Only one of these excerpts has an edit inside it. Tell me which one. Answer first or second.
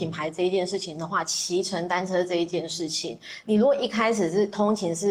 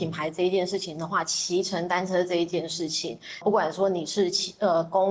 second